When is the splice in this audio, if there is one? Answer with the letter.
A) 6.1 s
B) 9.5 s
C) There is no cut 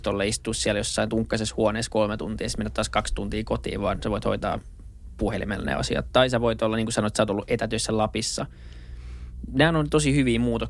C